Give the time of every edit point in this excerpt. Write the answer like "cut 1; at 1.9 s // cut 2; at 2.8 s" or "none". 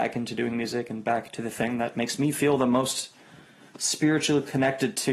none